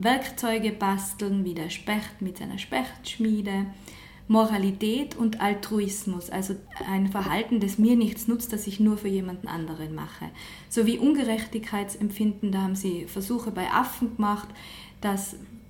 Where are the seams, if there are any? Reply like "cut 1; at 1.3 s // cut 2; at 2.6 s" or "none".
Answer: none